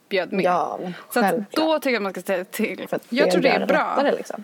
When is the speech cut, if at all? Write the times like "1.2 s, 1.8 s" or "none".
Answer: 2.9 s